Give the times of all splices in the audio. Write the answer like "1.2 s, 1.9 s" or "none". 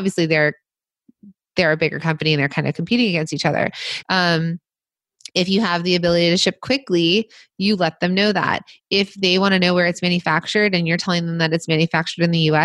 4.0 s

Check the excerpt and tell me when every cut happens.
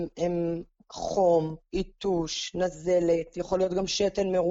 none

